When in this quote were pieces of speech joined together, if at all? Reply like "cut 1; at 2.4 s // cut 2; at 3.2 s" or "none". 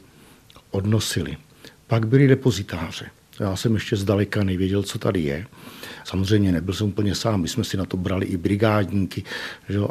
cut 1; at 6.0 s